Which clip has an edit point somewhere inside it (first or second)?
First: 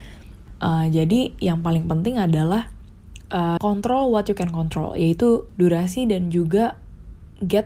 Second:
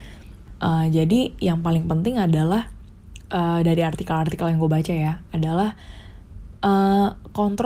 first